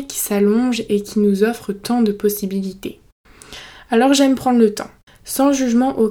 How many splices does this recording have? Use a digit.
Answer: 1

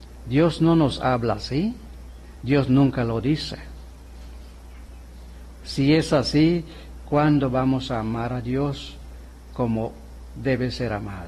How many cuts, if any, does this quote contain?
1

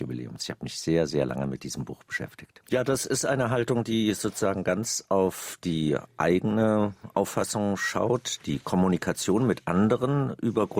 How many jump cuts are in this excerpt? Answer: 2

